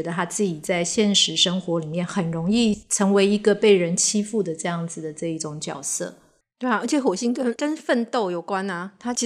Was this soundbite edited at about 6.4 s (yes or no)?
no